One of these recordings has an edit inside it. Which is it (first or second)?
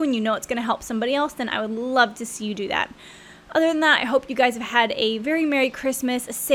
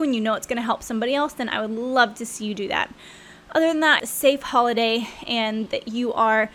second